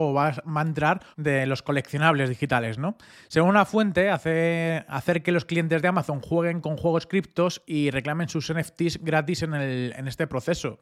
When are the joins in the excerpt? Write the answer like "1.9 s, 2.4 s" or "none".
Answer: 1.1 s

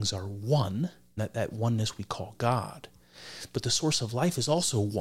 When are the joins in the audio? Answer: 1.2 s

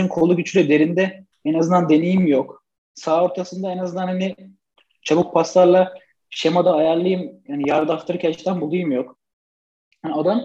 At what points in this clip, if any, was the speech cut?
none

